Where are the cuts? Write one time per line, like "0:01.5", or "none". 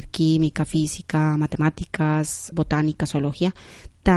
0:02.5